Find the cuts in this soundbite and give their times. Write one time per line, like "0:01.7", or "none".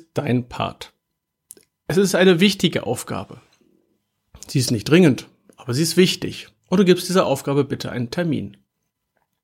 none